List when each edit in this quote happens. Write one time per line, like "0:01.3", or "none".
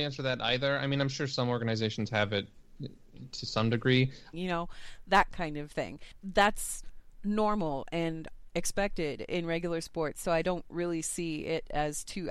0:04.3